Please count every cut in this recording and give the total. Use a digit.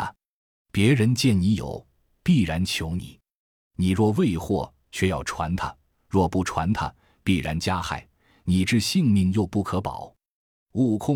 0